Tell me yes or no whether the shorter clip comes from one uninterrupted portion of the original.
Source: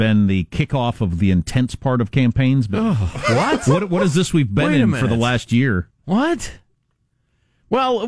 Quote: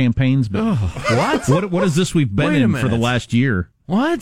yes